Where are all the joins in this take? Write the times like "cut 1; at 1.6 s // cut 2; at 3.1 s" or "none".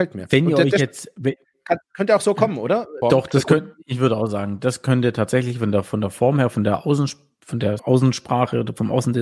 cut 1; at 3.0 s // cut 2; at 7.8 s